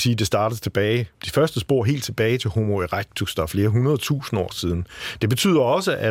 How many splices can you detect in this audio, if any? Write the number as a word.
one